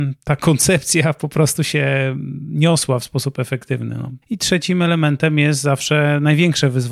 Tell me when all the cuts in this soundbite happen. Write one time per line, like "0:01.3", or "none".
0:04.2